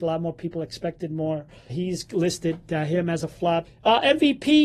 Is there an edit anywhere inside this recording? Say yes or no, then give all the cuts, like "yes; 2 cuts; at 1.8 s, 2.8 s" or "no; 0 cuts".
yes; 2 cuts; at 1.7 s, 3.6 s